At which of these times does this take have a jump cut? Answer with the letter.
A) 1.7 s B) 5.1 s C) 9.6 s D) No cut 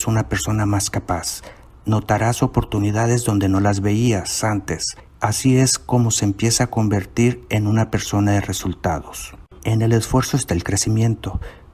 C